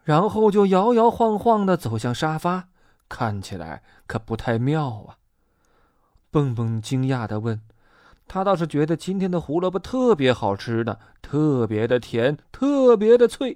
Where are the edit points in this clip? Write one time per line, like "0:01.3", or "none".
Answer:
0:06.2

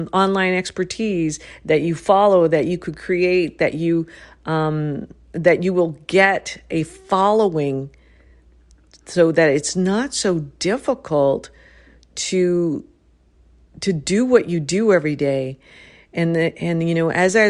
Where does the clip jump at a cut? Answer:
none

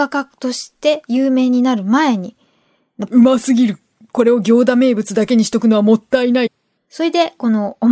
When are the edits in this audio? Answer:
0:03.1
0:06.8

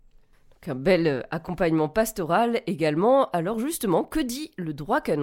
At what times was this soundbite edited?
none

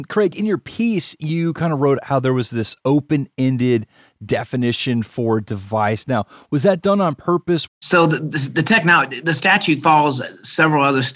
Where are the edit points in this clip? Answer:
0:07.7

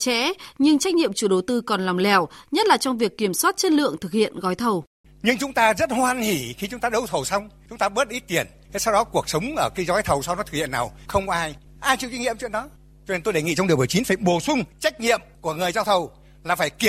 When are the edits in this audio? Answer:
0:05.0

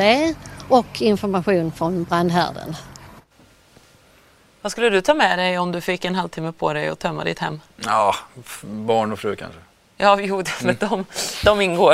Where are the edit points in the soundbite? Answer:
none

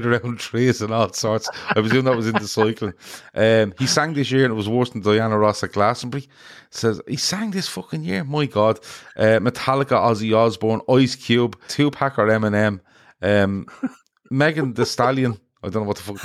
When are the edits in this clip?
0:11.7

